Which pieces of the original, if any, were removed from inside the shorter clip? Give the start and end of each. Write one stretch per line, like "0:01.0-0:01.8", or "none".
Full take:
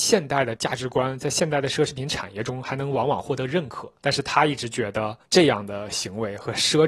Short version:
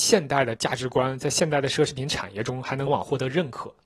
0:02.9-0:03.0